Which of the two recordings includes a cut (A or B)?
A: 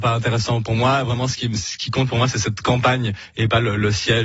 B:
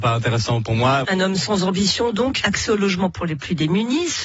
B